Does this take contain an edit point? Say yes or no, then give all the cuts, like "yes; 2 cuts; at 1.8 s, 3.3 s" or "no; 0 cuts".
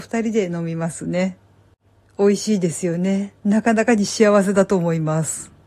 no; 0 cuts